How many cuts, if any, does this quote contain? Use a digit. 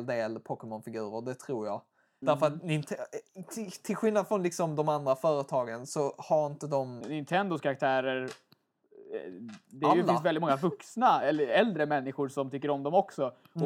2